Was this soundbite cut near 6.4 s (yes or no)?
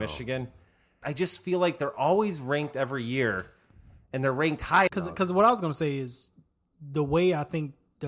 no